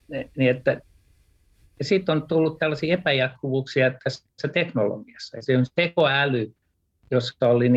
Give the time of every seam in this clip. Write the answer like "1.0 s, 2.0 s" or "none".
none